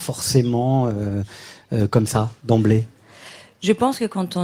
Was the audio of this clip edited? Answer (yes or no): no